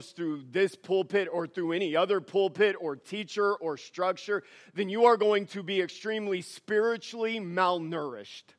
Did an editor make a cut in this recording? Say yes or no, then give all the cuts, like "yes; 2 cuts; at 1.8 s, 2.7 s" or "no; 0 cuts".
no; 0 cuts